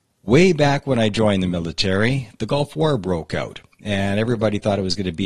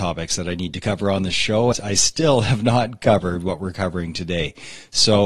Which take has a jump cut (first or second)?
second